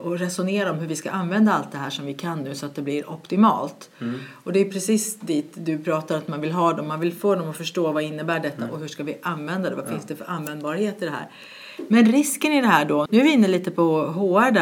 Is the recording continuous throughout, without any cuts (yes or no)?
no